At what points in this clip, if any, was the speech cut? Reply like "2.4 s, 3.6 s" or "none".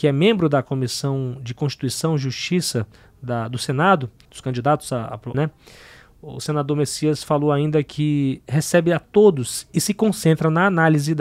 4.2 s, 5.3 s

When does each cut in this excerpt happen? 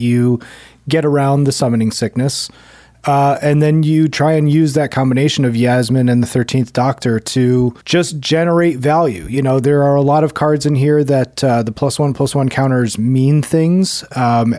7.8 s

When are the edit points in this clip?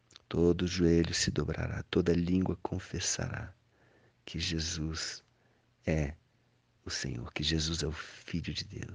none

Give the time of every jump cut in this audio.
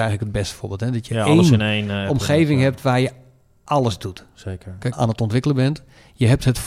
4.9 s

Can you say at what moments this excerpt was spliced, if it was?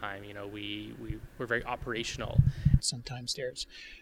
2.8 s

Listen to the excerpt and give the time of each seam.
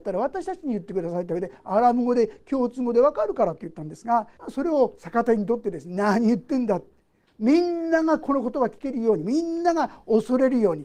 4.4 s

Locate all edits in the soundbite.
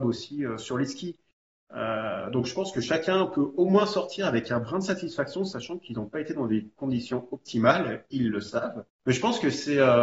9.0 s

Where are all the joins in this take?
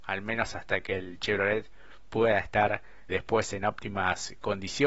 3.1 s

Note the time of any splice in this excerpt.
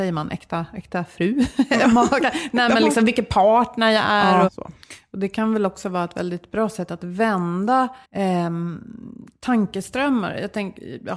4.5 s, 8.0 s

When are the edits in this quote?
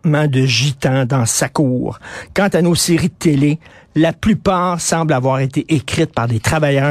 none

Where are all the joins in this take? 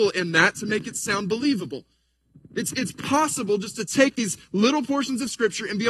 none

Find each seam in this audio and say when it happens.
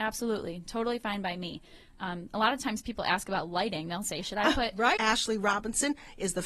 5.0 s

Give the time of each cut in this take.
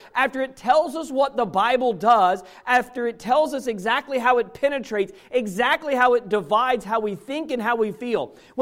none

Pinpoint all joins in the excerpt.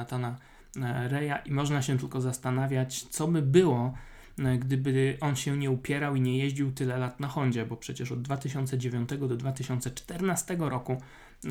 none

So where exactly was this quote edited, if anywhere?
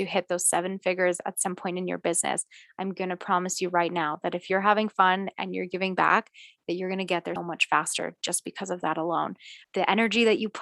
7.4 s, 9.6 s

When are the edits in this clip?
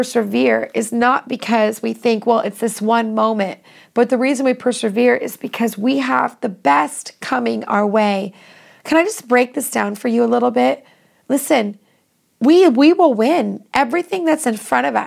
none

